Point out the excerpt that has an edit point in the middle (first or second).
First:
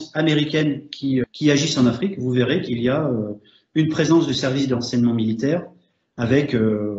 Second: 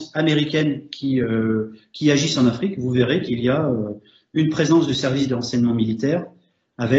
first